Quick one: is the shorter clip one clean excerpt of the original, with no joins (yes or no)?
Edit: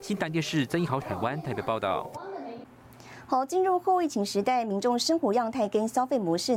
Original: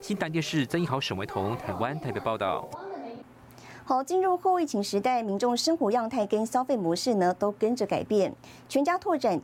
no